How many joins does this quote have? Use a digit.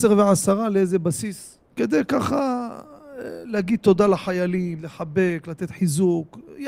2